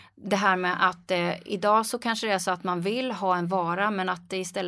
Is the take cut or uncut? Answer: uncut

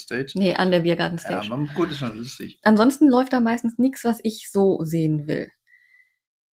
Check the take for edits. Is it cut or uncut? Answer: uncut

